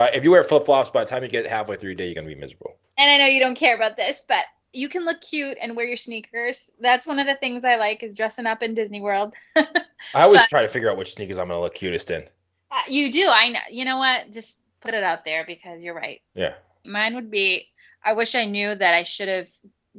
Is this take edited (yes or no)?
yes